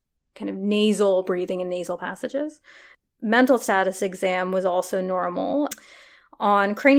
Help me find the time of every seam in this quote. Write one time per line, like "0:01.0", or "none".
0:03.0